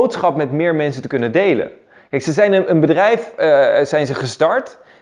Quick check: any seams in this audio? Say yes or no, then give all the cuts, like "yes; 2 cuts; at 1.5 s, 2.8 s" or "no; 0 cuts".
no; 0 cuts